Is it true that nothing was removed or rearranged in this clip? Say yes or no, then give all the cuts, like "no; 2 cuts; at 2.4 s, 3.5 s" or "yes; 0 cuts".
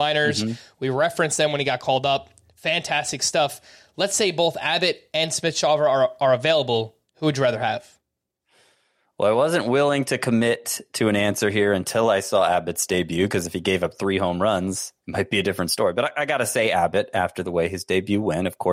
no; 1 cut; at 15.0 s